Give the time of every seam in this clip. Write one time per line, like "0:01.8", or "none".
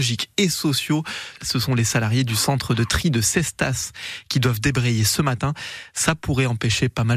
0:01.4

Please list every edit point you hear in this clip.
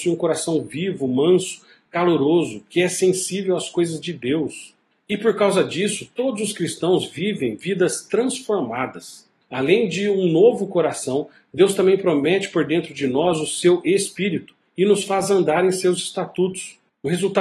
none

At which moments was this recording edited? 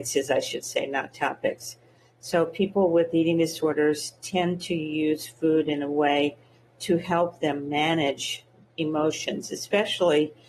none

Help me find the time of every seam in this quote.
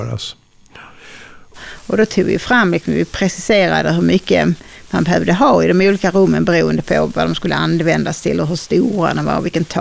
0:01.5

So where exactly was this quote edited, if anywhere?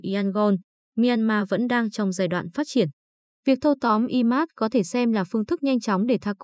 none

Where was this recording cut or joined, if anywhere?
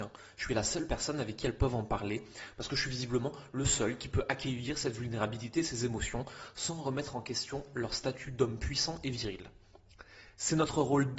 none

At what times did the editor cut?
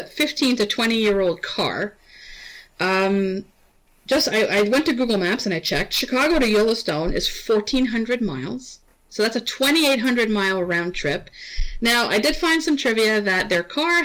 none

